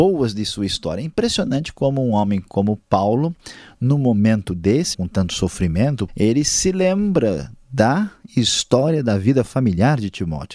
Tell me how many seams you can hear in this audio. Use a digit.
2